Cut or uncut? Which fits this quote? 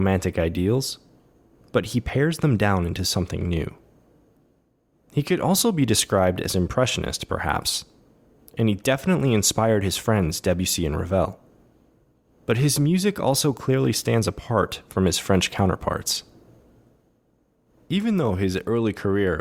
uncut